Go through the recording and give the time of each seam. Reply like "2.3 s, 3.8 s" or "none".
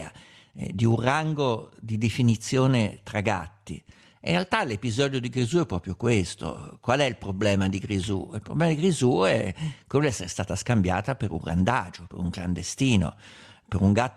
none